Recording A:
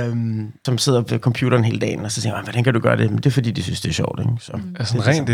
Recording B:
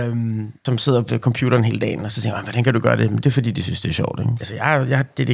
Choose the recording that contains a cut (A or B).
B